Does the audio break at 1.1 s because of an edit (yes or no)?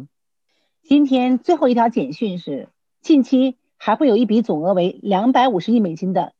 no